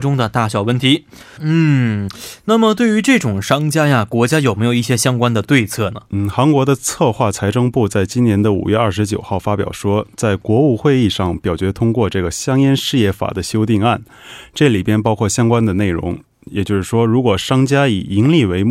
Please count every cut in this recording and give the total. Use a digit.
1